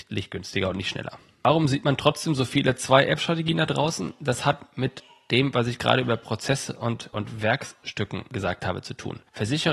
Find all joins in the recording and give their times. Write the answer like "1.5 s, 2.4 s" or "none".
none